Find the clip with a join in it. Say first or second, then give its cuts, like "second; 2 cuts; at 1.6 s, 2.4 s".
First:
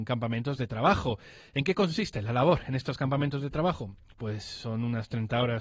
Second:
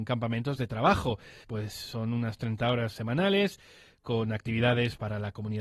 second; 1 cut; at 1.4 s